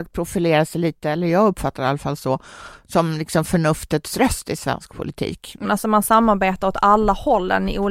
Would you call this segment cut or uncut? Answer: cut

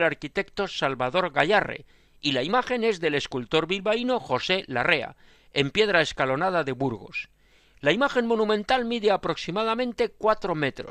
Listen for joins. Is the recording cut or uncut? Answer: uncut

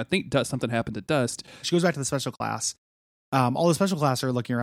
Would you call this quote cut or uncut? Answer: cut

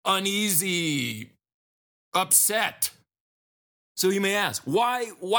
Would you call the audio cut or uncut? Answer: cut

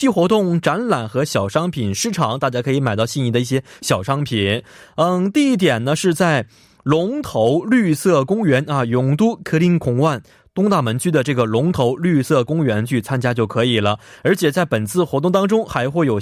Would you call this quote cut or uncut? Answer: uncut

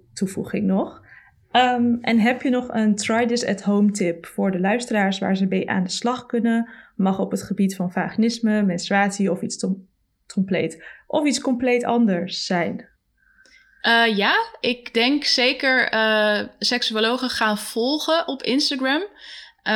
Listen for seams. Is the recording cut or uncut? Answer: uncut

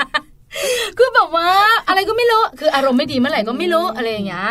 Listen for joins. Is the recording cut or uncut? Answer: uncut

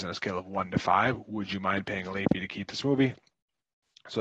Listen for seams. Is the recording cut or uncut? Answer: uncut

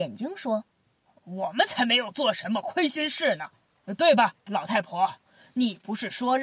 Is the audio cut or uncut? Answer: cut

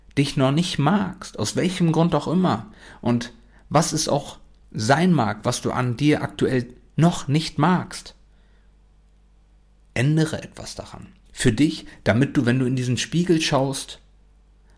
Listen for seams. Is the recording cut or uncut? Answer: uncut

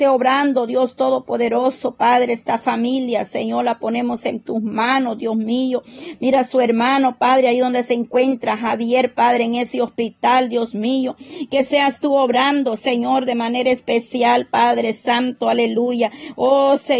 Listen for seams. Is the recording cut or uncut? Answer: uncut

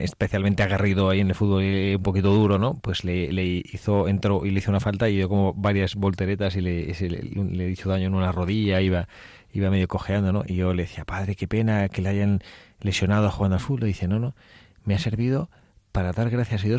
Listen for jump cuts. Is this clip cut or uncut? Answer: uncut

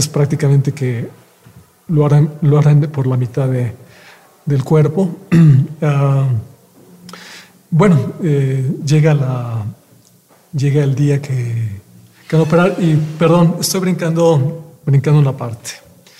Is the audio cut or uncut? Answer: uncut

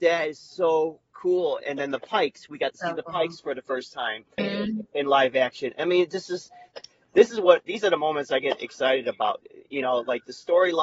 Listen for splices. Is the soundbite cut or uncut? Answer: cut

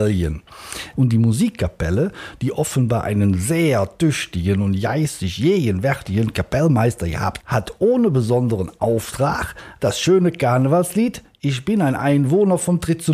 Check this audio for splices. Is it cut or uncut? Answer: cut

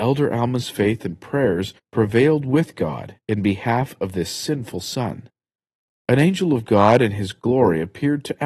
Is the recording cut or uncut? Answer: uncut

